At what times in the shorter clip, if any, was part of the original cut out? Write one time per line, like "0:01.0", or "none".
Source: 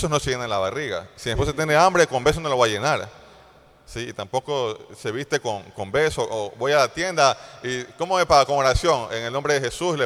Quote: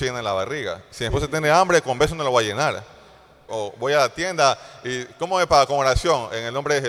0:03.5